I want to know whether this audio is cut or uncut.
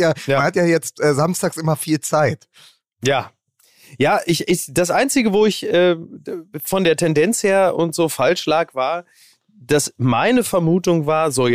uncut